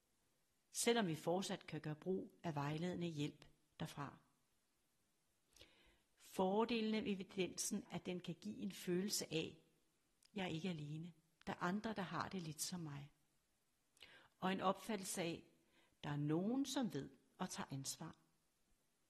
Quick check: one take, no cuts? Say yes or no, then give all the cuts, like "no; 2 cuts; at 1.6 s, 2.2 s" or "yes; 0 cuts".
no; 1 cut; at 7.8 s